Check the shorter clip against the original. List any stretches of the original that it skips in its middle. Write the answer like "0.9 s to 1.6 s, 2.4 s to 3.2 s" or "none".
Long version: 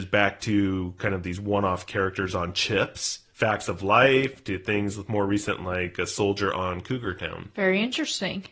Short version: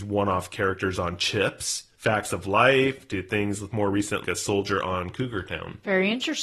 5.6 s to 5.9 s